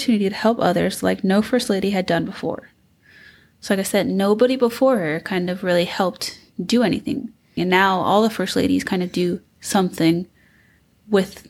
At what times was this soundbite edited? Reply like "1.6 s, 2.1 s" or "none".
7.6 s